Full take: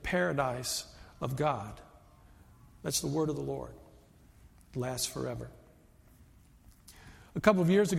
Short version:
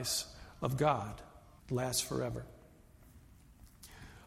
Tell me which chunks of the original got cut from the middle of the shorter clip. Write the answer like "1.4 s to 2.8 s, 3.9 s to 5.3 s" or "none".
2.2 s to 4.6 s